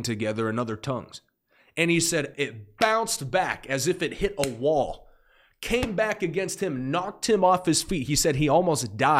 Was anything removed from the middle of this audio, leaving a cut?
yes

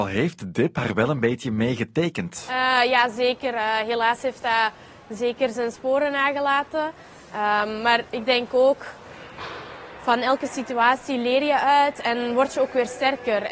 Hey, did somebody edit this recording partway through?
no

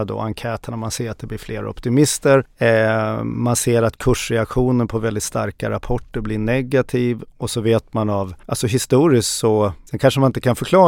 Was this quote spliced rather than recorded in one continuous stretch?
no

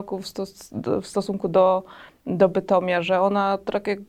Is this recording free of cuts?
yes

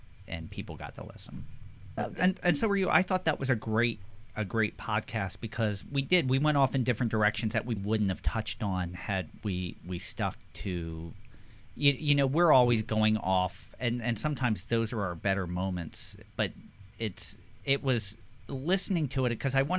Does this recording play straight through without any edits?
no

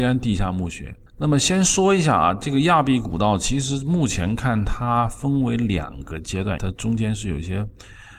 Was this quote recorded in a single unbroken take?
no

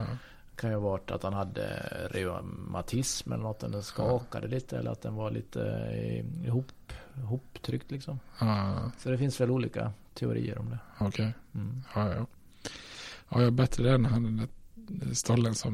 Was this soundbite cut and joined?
no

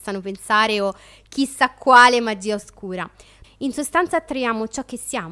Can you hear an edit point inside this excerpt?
yes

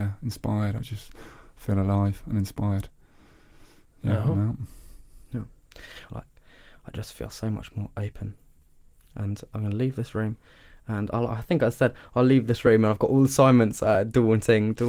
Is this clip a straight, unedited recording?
no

